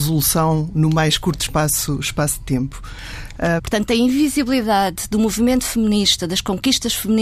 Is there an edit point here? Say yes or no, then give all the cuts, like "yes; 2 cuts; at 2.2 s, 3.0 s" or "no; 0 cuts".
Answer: yes; 1 cut; at 3.6 s